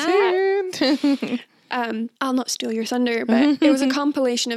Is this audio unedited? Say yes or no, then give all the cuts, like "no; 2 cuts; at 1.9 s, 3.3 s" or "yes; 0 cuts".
no; 1 cut; at 2.2 s